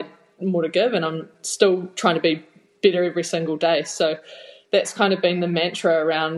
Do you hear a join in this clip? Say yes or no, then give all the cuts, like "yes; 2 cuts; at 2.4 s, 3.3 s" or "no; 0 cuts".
no; 0 cuts